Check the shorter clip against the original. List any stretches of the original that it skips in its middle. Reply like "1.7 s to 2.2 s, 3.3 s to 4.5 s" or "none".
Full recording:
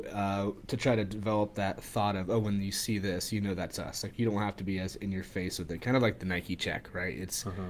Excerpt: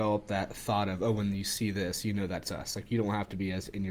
none

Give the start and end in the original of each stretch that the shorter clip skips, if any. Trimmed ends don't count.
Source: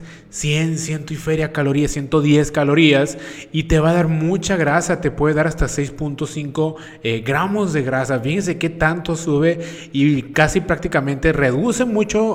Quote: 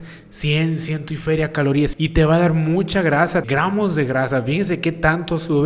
1.9 s to 3.5 s, 5.0 s to 7.2 s

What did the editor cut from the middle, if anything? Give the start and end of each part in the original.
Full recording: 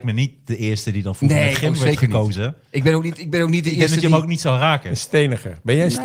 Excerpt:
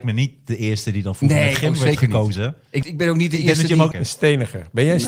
2.8 s to 3.2 s, 4.2 s to 4.8 s

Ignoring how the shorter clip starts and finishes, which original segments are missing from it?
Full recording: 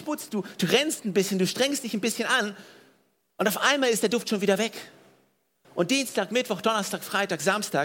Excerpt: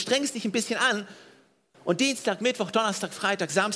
3.2 s to 5.6 s

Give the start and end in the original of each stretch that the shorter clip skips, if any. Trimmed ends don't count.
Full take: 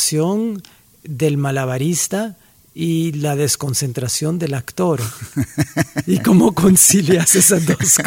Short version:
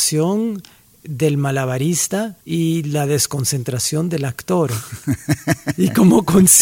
2.4 s to 2.7 s

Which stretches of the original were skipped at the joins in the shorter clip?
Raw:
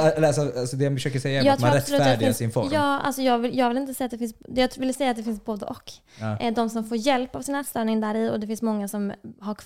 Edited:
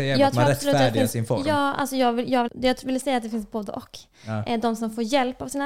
3.7 s to 4.4 s

